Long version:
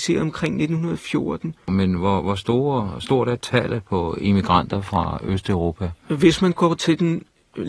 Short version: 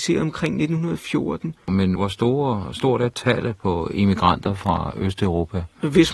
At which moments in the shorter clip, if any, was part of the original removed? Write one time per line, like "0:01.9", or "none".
0:02.0